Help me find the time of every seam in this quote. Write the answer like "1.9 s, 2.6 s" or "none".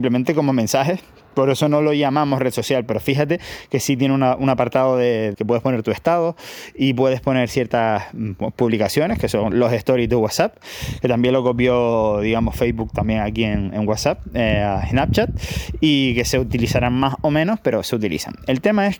5.3 s